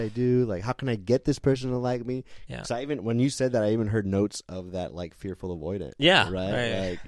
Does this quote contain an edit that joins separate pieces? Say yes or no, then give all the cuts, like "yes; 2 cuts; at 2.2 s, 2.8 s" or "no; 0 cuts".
yes; 1 cut; at 2.5 s